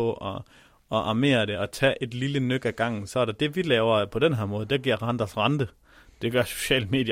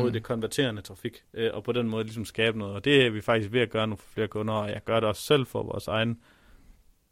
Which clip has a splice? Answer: second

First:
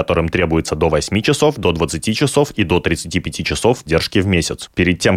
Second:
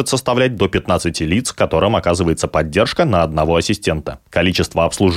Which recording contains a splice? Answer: first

